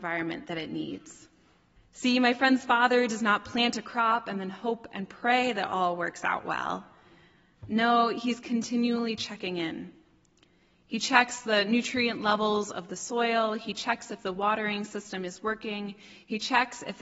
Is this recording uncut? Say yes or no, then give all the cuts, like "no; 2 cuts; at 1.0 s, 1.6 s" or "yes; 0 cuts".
no; 1 cut; at 1.8 s